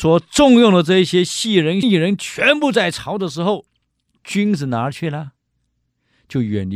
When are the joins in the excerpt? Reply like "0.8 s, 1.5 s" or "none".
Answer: 1.8 s